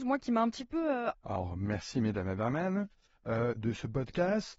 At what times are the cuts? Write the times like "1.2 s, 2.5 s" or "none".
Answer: 1.1 s, 3.6 s